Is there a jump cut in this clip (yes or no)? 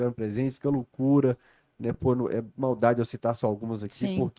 no